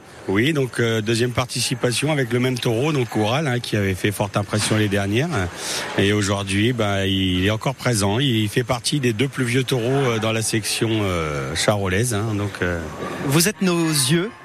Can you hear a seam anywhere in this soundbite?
no; 0 cuts

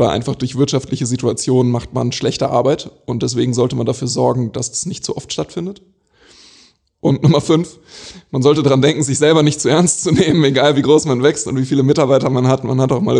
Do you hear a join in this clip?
no; 0 cuts

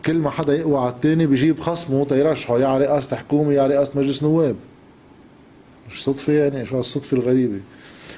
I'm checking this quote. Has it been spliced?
yes; 1 cut; at 6.7 s

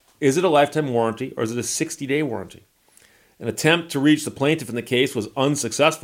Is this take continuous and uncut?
yes; 0 cuts

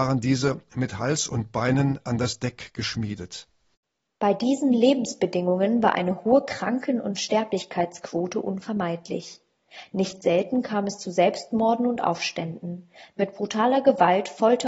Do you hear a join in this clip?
no; 0 cuts

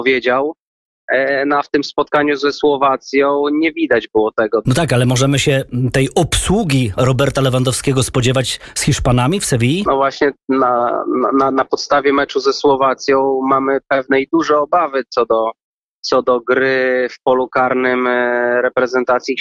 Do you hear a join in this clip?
yes; 1 cut; at 4.6 s

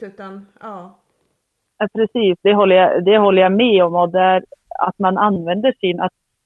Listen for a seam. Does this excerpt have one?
no; 0 cuts

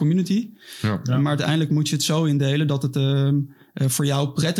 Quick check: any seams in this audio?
no; 0 cuts

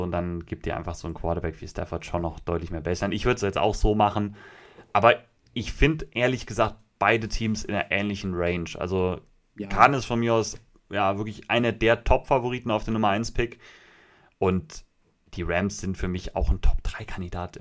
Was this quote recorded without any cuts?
yes; 0 cuts

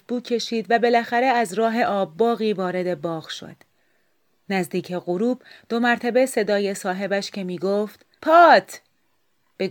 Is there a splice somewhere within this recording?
yes; 1 cut; at 8.2 s

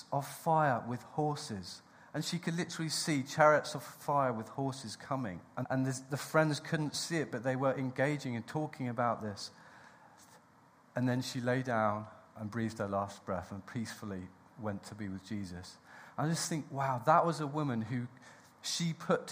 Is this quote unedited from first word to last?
no; 1 cut; at 5.6 s

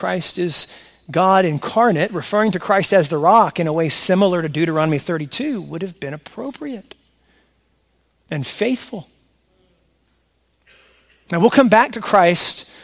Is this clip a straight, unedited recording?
yes; 0 cuts

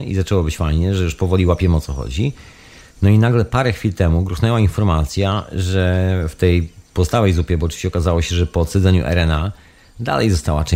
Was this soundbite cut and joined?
no; 0 cuts

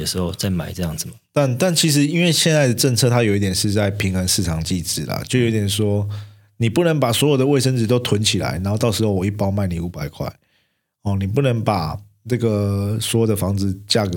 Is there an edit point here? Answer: no; 0 cuts

